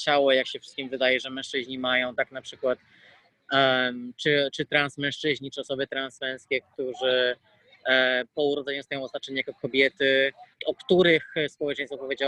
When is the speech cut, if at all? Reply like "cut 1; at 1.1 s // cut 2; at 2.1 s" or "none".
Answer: cut 1; at 10.5 s